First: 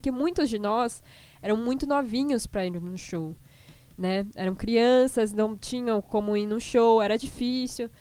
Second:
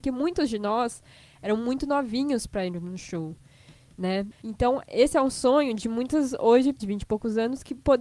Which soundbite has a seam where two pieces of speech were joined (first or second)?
second